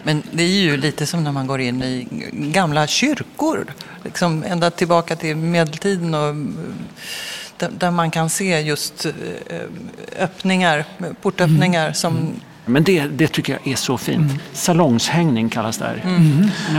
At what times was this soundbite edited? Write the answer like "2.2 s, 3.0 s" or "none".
12.7 s